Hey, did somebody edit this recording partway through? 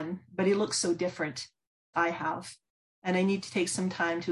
yes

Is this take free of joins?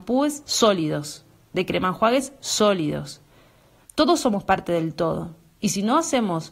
no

